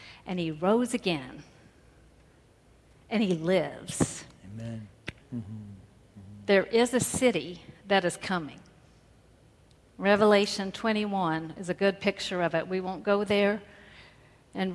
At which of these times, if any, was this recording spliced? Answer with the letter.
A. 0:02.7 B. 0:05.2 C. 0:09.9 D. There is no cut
B